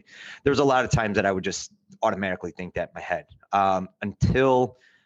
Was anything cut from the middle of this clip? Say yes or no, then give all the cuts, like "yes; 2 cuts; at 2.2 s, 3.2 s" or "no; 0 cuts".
no; 0 cuts